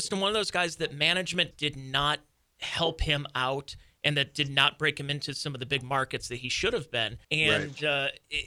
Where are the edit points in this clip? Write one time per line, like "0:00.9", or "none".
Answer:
0:01.5
0:07.2